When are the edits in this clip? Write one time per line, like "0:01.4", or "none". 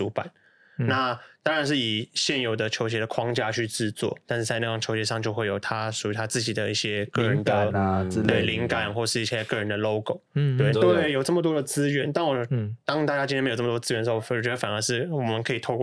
0:10.7